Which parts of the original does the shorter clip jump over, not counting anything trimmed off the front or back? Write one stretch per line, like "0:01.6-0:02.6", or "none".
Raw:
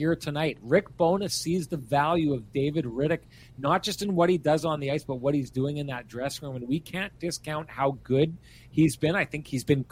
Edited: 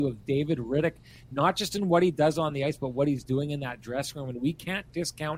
none